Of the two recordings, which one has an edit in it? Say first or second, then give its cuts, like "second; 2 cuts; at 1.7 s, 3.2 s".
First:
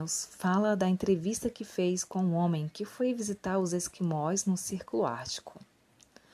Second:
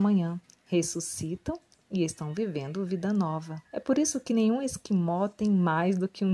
second; 1 cut; at 3.7 s